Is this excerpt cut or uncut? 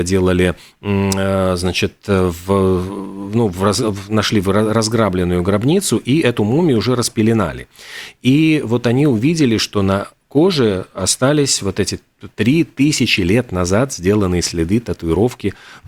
uncut